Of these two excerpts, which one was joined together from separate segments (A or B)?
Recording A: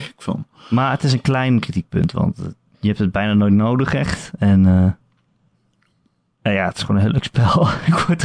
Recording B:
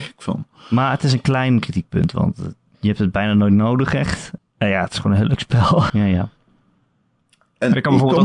B